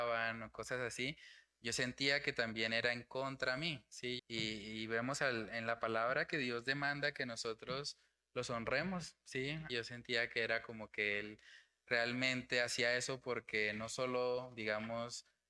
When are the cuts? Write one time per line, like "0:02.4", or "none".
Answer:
0:04.2
0:09.7